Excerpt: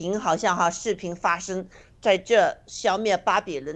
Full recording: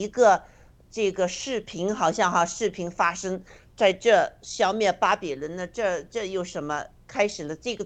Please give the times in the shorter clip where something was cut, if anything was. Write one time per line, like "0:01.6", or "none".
none